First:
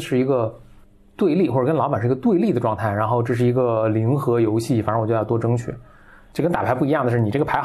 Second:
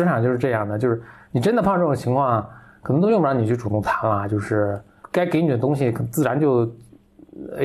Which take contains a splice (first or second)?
first